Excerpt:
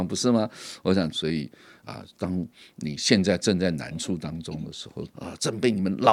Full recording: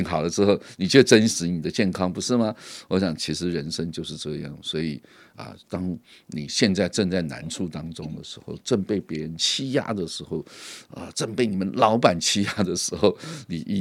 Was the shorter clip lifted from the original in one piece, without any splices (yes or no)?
no